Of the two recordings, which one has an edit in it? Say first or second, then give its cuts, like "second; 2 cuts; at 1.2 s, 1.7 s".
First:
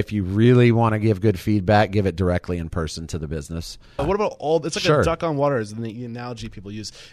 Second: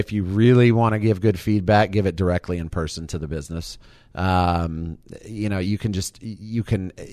first; 1 cut; at 4.0 s